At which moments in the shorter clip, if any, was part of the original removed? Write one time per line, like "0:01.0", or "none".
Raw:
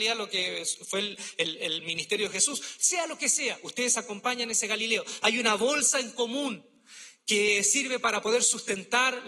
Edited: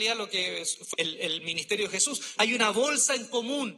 0:00.9
0:02.4